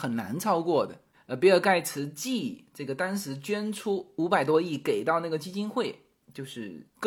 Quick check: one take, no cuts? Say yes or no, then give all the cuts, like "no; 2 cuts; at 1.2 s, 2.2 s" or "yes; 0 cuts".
no; 1 cut; at 1.1 s